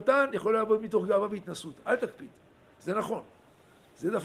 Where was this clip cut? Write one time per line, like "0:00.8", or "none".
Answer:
none